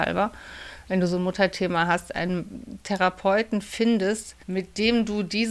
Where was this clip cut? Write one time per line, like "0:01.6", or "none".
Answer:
0:04.4